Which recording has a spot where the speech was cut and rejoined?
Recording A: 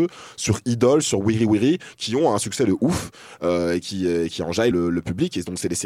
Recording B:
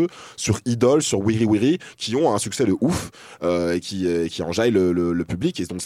A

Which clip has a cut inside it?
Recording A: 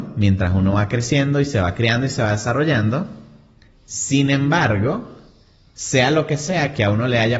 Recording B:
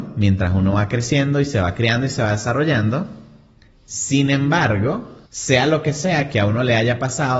B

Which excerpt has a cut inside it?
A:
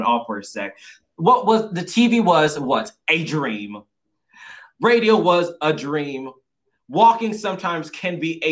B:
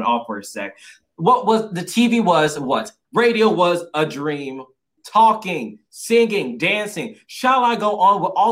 B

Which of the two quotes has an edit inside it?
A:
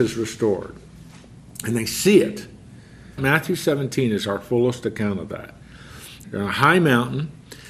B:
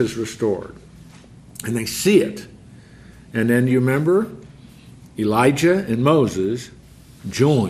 A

